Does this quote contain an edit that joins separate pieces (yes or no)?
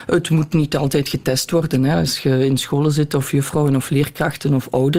no